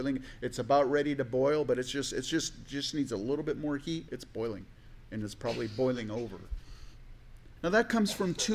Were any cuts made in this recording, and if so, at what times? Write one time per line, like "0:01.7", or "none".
0:04.1
0:07.6